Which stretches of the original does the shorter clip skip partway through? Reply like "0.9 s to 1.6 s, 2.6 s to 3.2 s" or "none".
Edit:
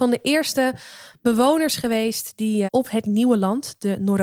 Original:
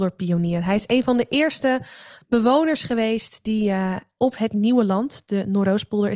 3.7 s to 4.1 s